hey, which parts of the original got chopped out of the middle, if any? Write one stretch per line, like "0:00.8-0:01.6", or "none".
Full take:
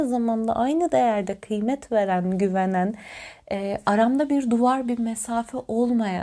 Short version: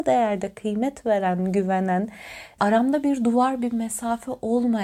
0:03.4-0:03.8

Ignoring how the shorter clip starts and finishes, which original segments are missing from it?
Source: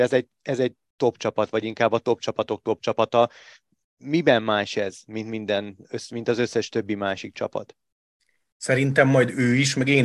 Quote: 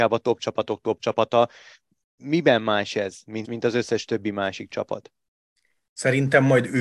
0:05.2-0:06.1

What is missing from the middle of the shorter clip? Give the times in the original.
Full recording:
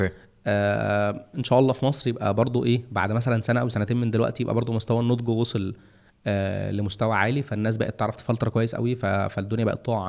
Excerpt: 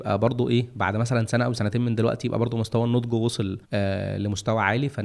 0:05.8-0:06.2

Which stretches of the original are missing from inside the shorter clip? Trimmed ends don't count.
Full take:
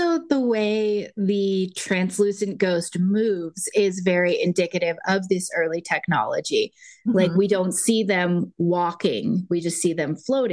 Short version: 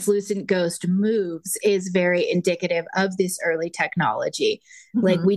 none

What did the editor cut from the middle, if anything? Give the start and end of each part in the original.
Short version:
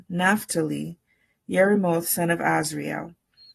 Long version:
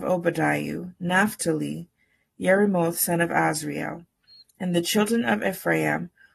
none

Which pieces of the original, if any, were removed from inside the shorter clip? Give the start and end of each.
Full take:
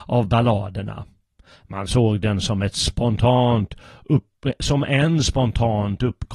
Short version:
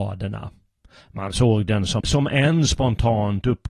0:02.5-0:04.6

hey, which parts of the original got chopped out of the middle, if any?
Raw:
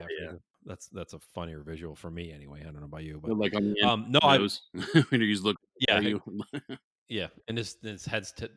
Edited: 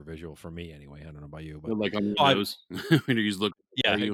0:03.8-0:04.2

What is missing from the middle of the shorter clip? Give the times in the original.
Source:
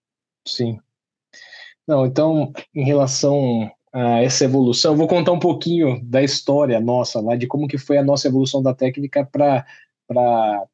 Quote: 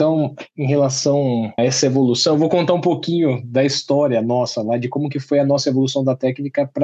0:03.8-0:04.2

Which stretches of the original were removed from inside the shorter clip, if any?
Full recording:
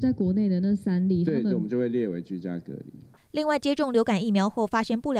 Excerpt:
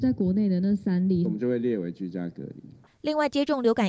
0:01.2-0:01.5

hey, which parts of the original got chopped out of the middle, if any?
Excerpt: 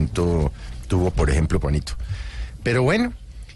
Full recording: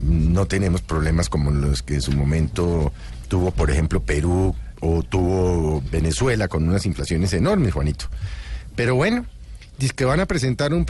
0:04.0-0:07.7

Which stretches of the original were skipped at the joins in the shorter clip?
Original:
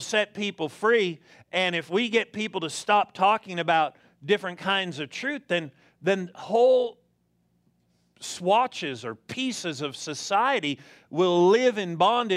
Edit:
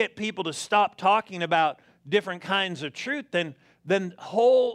none

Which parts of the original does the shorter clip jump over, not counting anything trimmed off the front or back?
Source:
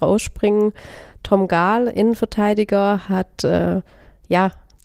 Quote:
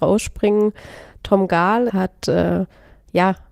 0:01.9-0:03.1

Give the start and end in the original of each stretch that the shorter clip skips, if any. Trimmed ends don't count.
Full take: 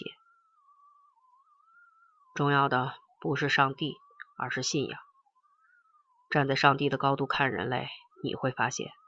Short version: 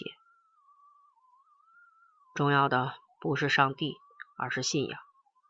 none

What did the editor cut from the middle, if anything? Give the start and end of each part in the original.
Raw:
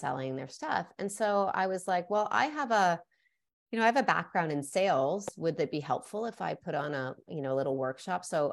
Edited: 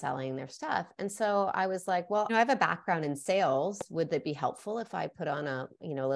0:02.3-0:03.8

